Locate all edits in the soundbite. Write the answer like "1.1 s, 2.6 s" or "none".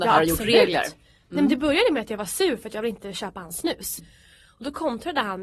4.0 s